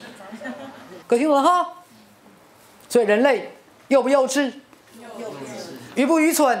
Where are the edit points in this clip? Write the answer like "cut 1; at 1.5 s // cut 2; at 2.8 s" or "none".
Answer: cut 1; at 1.0 s